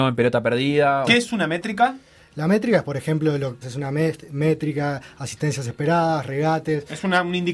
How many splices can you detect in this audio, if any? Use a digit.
2